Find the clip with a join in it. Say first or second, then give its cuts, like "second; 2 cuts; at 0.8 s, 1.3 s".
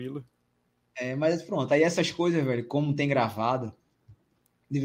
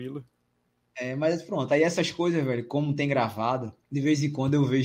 second; 1 cut; at 3.8 s